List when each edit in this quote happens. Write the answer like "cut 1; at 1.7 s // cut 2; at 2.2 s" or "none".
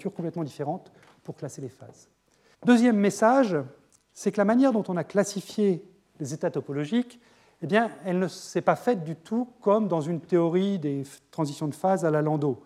cut 1; at 2.5 s